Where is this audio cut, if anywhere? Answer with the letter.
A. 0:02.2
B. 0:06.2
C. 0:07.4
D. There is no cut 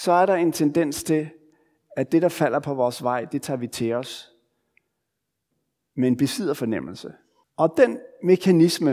C